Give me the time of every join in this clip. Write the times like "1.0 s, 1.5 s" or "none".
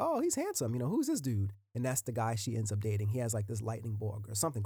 none